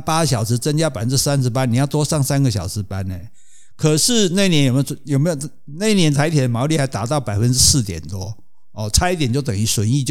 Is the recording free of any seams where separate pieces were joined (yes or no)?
yes